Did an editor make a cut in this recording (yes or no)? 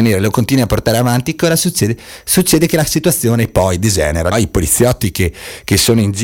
yes